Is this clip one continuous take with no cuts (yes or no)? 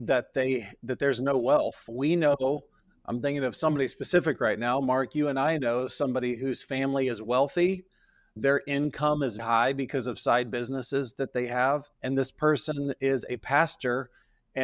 no